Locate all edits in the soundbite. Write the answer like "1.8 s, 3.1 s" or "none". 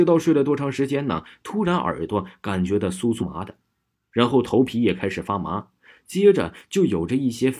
3.2 s